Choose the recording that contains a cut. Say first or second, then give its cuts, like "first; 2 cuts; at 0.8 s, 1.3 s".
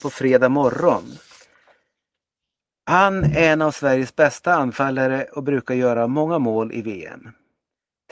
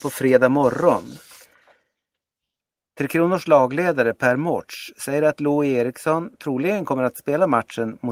second; 1 cut; at 2.8 s